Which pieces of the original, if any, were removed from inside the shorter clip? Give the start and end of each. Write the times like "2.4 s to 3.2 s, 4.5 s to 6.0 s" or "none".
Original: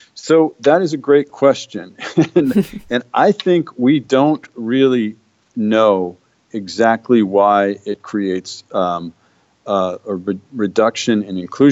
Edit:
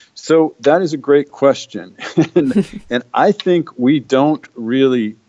none